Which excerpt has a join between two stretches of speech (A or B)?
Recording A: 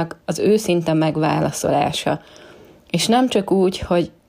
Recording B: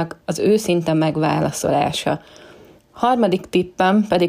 B